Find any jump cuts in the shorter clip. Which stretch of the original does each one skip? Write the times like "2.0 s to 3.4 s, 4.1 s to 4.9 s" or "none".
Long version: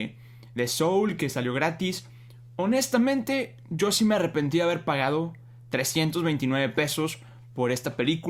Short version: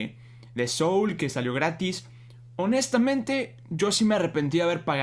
none